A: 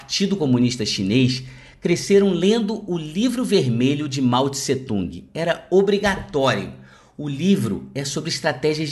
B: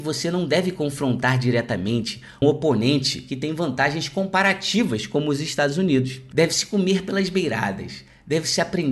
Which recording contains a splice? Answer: B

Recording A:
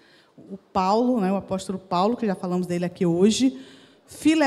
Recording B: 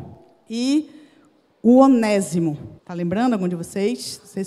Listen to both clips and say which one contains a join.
B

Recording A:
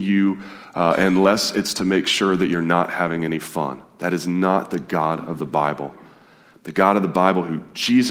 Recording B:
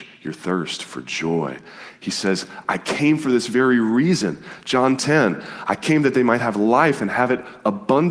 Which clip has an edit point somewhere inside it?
B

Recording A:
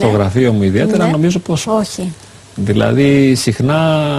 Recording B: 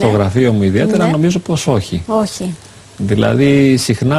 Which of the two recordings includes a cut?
A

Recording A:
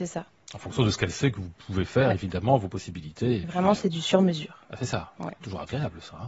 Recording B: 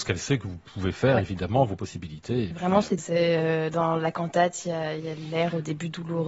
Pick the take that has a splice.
B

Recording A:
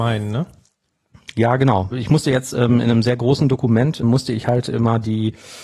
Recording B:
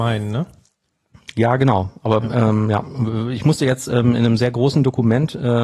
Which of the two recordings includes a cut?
A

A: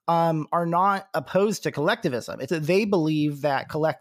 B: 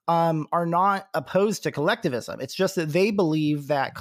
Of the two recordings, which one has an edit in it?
A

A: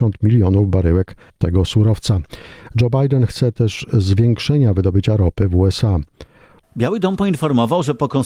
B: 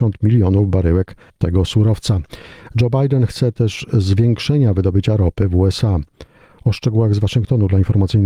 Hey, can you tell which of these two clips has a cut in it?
A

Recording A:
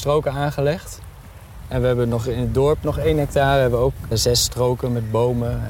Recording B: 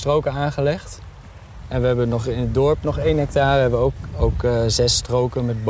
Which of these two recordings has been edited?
A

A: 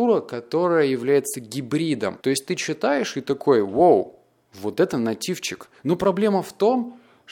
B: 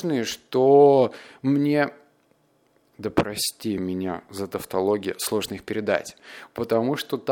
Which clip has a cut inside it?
A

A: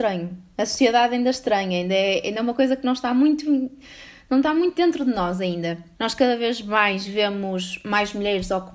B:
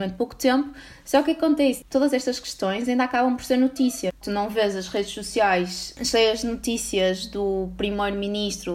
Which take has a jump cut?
A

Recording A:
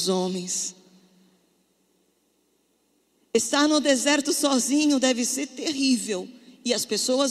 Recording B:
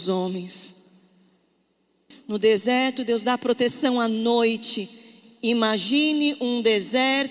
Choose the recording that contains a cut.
B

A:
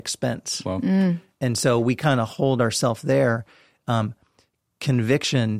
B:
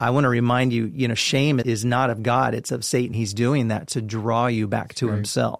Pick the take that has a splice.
B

